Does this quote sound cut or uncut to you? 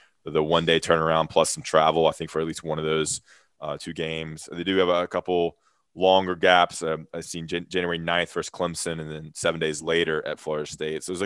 uncut